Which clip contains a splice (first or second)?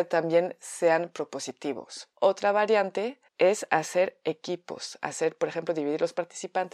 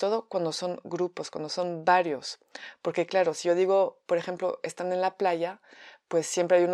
first